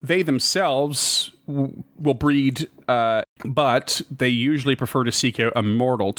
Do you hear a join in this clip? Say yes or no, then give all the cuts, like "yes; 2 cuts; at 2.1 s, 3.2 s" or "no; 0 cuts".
yes; 1 cut; at 3.2 s